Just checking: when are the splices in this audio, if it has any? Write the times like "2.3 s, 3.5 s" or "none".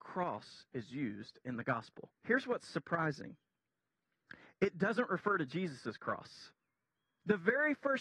2.2 s